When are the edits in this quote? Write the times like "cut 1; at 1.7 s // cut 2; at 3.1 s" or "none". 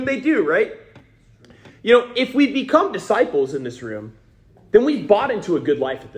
none

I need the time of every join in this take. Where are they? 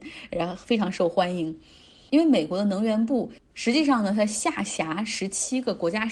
cut 1; at 2.1 s

